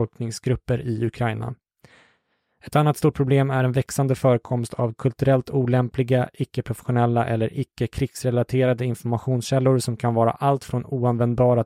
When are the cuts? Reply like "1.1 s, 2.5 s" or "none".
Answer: none